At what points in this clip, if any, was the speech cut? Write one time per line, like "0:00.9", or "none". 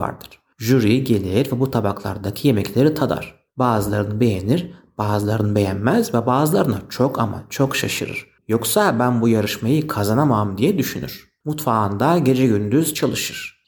0:08.4
0:11.4